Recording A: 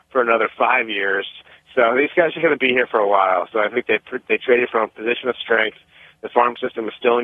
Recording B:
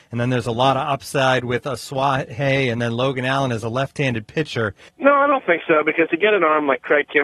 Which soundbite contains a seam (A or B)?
B